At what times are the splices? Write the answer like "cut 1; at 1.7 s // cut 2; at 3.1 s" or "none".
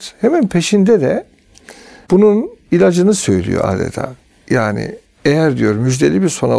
none

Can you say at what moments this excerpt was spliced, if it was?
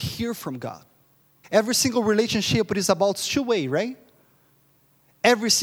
cut 1; at 1.4 s

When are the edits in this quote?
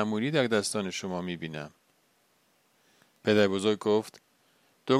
none

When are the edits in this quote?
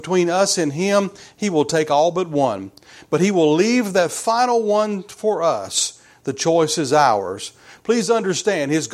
none

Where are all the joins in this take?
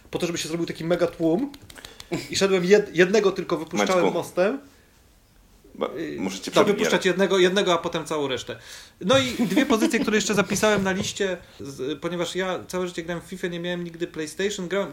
cut 1; at 6.7 s // cut 2; at 11.6 s

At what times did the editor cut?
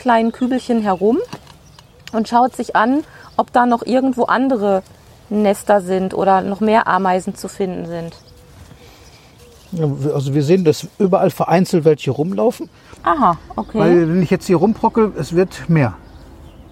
cut 1; at 13.0 s

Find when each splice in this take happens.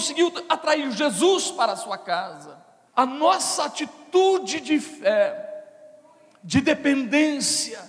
cut 1; at 2.9 s

